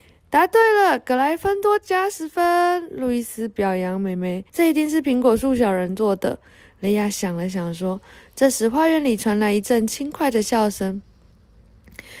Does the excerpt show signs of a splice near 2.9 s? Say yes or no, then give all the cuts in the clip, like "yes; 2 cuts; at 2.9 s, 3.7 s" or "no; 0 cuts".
no; 1 cut; at 4.5 s